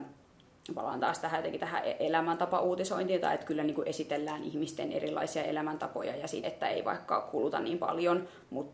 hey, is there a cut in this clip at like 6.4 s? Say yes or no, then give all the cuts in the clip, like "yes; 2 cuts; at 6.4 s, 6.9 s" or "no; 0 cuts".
yes; 1 cut; at 6.4 s